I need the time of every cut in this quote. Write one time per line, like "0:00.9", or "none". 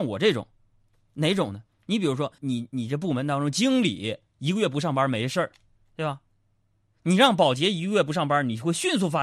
0:02.4